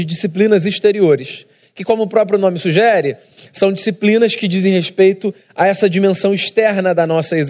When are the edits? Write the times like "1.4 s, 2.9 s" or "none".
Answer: none